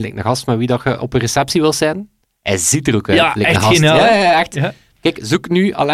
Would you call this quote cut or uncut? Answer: uncut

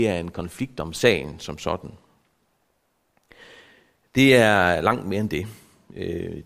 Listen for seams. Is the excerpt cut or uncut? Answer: uncut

